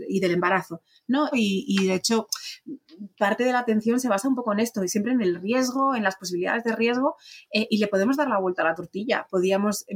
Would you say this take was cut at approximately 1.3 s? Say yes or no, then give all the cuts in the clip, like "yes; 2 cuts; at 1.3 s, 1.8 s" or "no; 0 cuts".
yes; 1 cut; at 1.3 s